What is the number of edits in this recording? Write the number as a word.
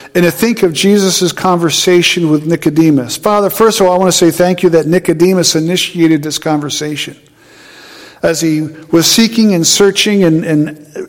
zero